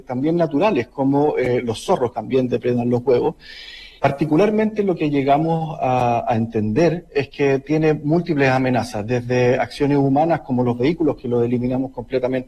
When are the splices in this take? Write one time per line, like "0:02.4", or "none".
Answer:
0:02.1
0:04.0